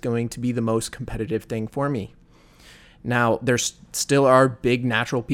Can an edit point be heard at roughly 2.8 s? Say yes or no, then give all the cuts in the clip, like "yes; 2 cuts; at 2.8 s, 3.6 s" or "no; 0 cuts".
no; 0 cuts